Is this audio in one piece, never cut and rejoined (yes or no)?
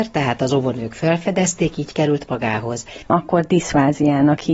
no